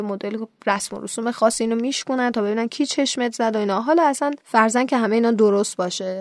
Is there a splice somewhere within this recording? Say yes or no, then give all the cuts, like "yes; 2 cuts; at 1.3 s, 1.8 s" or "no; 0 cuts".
yes; 1 cut; at 4.4 s